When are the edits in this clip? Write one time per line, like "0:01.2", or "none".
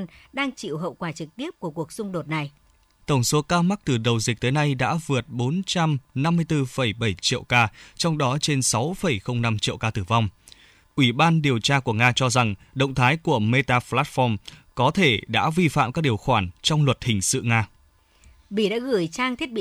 0:03.0
0:10.8